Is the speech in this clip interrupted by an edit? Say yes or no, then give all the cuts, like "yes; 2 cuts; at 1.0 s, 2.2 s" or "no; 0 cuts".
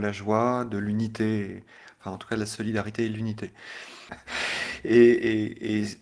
yes; 1 cut; at 4.1 s